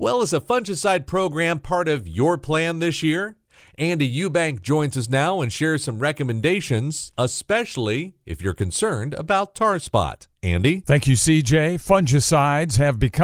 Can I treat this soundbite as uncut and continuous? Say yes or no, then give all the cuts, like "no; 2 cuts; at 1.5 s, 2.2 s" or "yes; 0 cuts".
yes; 0 cuts